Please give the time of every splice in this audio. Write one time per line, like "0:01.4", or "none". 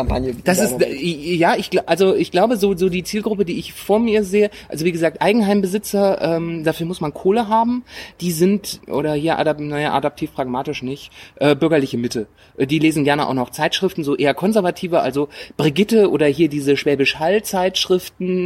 0:08.8

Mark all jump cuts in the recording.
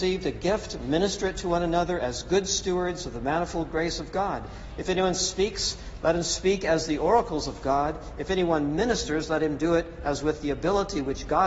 none

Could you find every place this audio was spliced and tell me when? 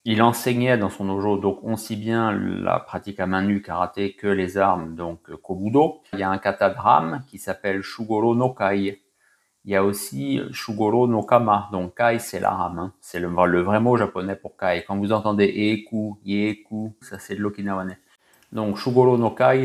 0:06.1
0:17.0

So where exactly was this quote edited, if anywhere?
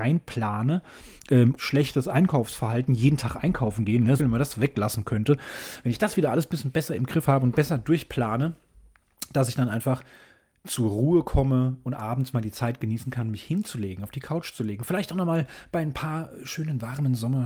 0:01.6
0:04.2
0:12.3

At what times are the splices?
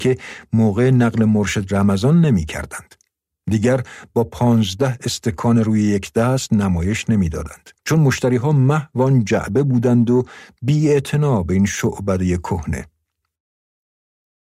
0:03.4
0:07.8

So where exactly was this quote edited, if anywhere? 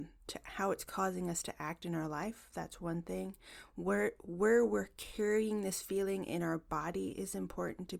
none

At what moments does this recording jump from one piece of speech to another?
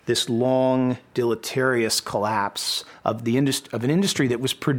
none

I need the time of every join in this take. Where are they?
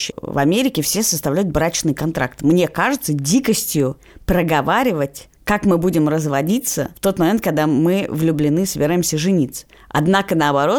none

